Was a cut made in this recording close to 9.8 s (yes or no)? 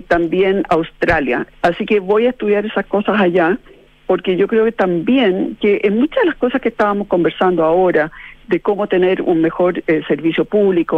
no